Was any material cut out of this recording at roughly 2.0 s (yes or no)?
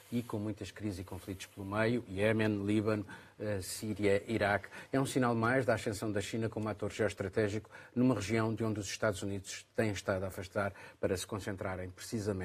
no